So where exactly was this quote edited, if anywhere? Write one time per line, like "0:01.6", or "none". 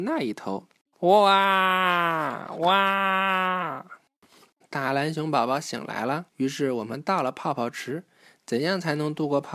0:00.9
0:04.6
0:06.3